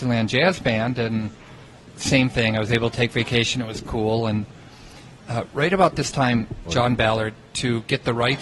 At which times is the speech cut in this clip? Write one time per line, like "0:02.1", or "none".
0:06.7